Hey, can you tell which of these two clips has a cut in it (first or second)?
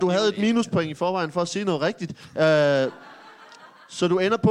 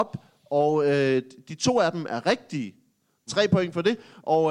second